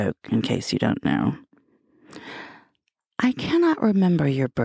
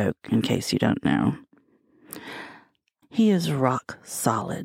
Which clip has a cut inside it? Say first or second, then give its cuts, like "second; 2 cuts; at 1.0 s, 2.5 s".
second; 1 cut; at 3.0 s